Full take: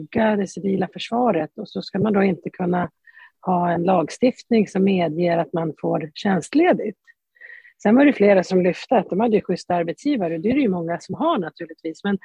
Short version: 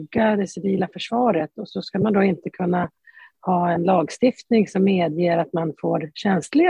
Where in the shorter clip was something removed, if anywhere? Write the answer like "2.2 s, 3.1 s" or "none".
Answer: none